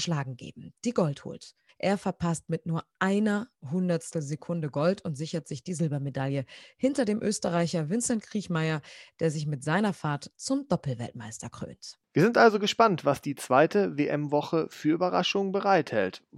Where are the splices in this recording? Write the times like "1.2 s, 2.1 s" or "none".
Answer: 1.7 s